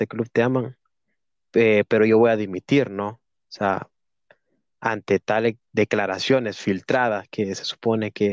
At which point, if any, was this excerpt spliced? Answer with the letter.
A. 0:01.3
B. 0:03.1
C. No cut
C